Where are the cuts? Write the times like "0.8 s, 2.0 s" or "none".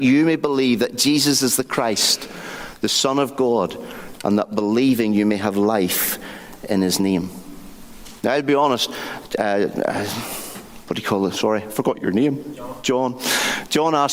none